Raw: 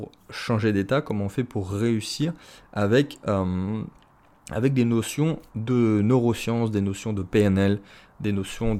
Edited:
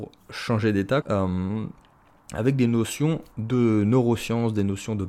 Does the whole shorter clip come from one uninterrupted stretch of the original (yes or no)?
no